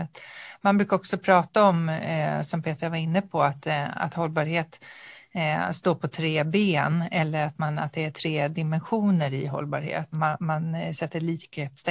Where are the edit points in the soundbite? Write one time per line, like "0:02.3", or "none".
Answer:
0:10.1